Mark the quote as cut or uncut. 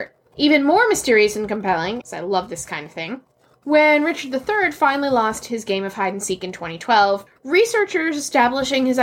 cut